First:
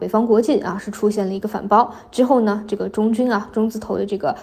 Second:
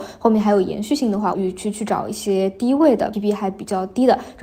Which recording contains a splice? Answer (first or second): second